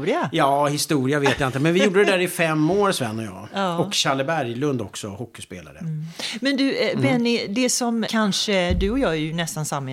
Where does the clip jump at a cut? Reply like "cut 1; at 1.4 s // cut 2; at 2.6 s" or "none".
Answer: cut 1; at 8.1 s